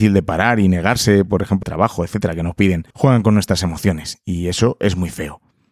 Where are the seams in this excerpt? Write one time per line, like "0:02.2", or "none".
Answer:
0:01.6
0:02.9